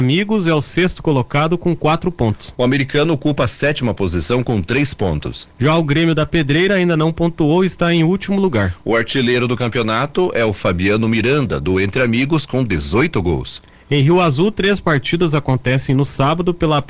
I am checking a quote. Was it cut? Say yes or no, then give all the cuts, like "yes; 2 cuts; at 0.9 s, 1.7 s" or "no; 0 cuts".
no; 0 cuts